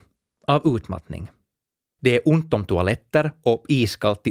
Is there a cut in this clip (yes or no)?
yes